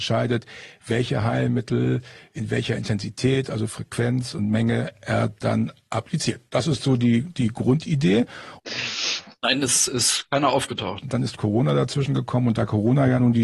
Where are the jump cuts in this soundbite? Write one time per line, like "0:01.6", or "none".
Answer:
0:08.6
0:11.0